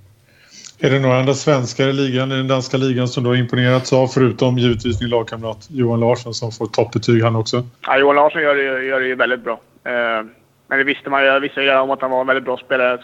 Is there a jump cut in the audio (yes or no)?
yes